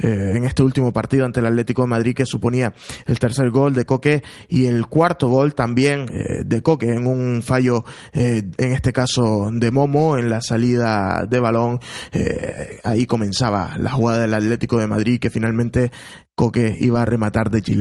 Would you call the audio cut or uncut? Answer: uncut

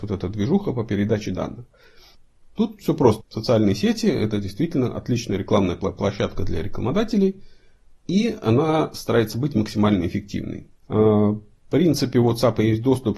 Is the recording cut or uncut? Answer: cut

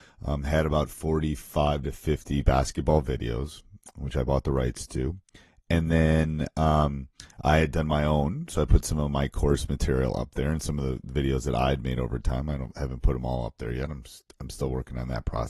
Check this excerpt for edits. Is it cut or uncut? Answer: uncut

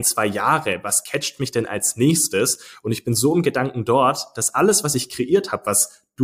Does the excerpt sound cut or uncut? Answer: uncut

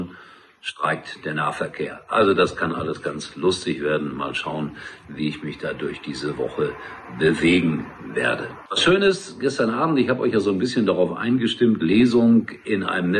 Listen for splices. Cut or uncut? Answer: cut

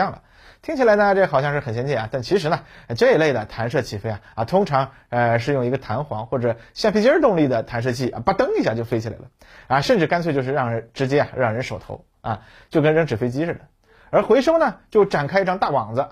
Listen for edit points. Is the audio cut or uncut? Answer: uncut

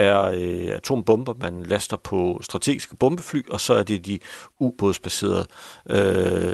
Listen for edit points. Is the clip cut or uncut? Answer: uncut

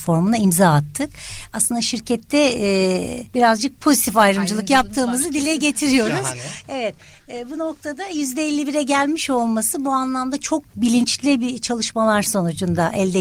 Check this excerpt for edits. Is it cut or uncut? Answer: cut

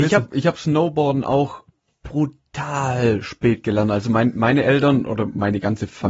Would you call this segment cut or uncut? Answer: uncut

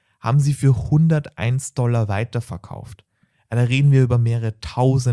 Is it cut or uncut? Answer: uncut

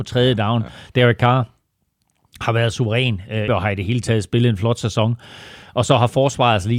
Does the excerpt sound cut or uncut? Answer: cut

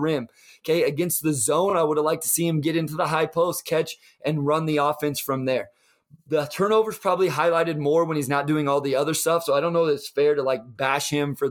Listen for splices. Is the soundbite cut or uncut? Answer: uncut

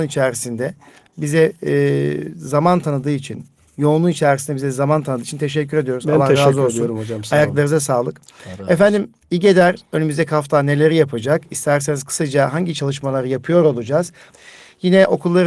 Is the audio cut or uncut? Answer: cut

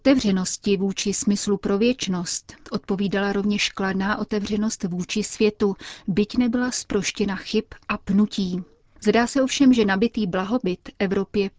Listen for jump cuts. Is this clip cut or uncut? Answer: uncut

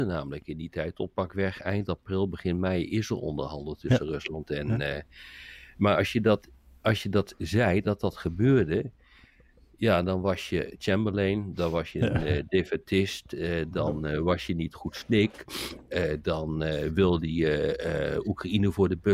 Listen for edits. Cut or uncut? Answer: uncut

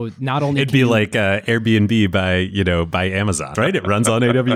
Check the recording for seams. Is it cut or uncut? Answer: cut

